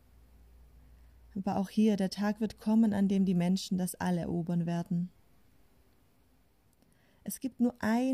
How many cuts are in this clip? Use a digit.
0